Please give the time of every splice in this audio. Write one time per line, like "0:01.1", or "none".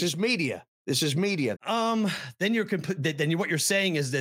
0:01.6